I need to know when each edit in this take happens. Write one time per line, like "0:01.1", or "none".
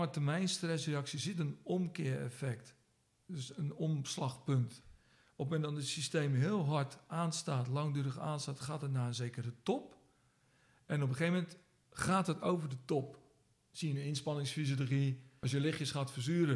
none